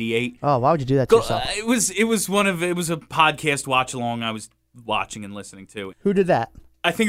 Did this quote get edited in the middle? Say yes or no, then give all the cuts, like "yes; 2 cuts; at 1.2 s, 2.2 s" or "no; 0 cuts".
yes; 1 cut; at 5.9 s